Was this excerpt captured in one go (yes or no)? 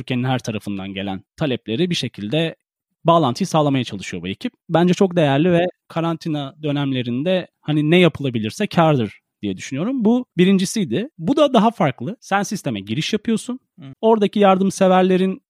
no